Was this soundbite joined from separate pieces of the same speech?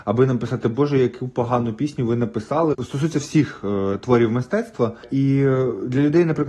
yes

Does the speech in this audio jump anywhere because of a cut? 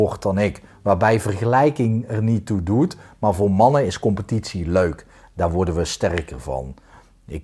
no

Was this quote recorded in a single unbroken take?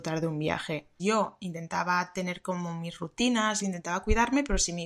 no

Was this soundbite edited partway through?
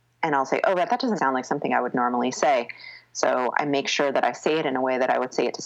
yes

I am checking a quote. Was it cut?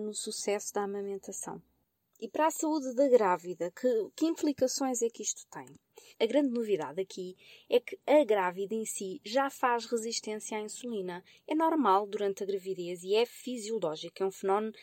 yes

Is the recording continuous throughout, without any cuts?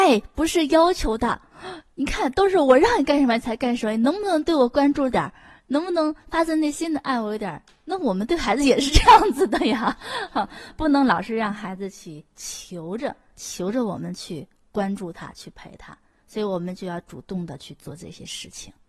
yes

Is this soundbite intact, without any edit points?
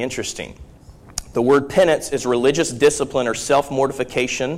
yes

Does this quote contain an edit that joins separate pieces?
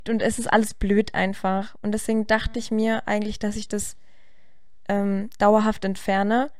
no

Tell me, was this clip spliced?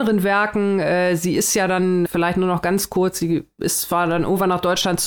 yes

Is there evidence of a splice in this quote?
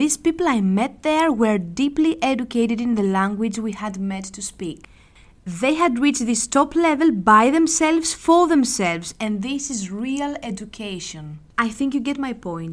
yes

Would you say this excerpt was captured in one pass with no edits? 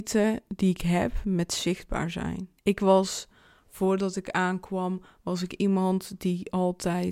no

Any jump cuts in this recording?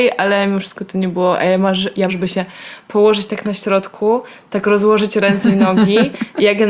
yes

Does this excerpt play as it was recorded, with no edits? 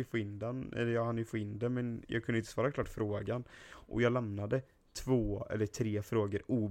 yes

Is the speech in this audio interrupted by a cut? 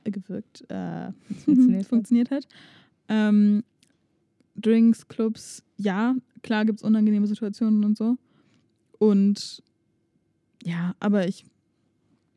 no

